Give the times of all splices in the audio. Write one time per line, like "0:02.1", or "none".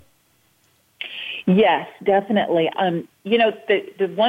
0:02.7